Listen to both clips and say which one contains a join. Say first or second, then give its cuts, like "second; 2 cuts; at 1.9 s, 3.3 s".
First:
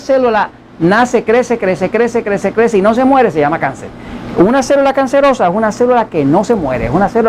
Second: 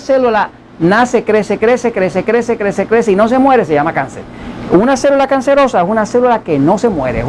first; 1 cut; at 1.2 s